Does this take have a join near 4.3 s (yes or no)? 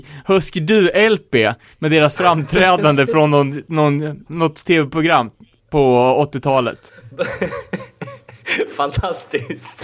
yes